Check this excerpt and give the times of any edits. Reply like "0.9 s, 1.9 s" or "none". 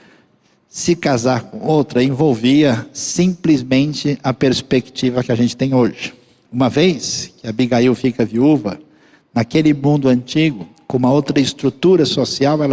none